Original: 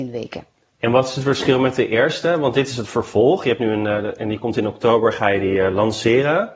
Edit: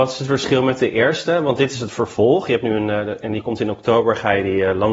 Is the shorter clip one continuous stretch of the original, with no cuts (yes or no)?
yes